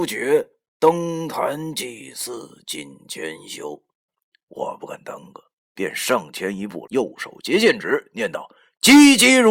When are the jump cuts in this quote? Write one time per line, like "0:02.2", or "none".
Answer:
0:04.1
0:06.9